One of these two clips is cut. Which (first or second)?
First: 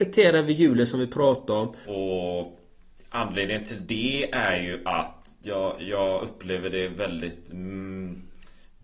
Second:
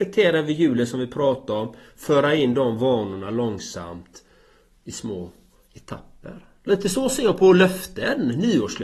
first